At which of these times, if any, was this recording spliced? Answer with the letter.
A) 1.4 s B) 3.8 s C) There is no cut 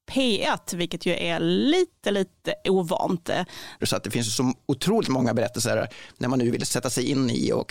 B